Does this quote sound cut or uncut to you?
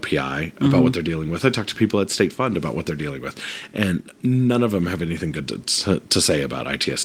uncut